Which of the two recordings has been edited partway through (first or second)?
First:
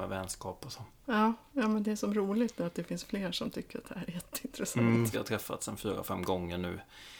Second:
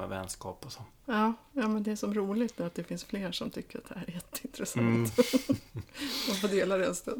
first